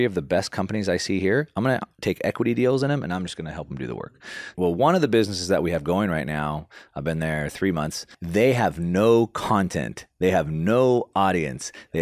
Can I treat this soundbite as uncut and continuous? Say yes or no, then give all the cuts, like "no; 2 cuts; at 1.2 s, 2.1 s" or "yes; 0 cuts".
yes; 0 cuts